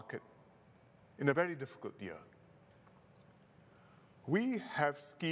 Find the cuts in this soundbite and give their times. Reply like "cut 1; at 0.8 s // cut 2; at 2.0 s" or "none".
none